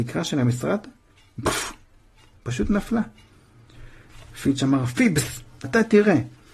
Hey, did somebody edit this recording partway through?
yes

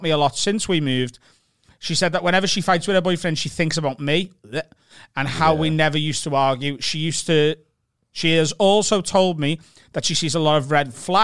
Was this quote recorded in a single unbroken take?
yes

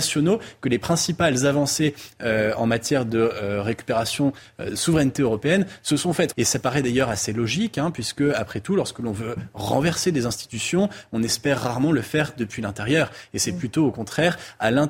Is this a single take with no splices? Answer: no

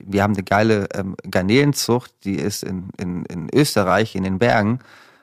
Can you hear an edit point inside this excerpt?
no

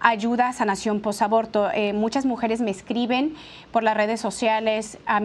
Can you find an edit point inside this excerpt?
no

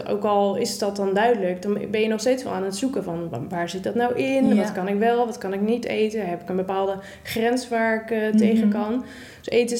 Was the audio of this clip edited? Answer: no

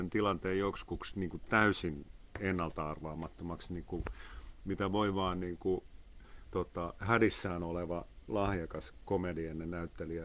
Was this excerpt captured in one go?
no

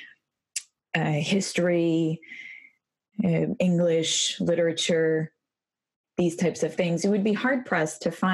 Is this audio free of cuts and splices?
yes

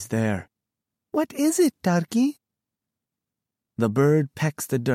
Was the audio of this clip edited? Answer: yes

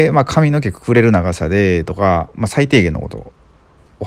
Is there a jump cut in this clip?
no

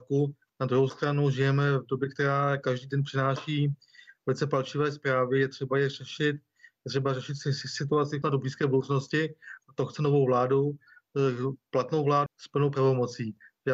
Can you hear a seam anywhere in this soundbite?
yes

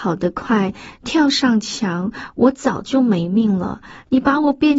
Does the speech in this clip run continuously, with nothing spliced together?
yes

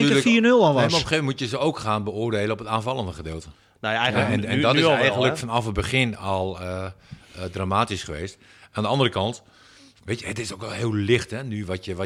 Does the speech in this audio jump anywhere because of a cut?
no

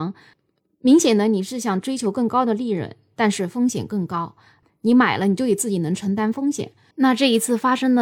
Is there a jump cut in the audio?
yes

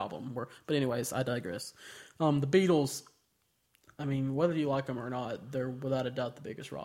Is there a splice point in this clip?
no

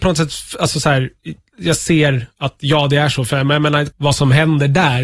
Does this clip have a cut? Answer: yes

